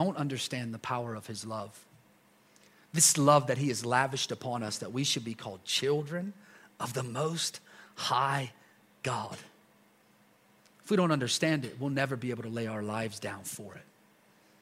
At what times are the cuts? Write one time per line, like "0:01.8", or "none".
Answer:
none